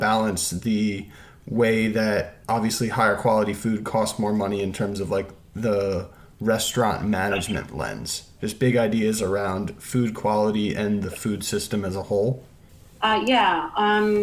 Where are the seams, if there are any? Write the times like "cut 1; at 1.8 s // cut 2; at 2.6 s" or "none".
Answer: none